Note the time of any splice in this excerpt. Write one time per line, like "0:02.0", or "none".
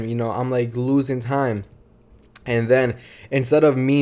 none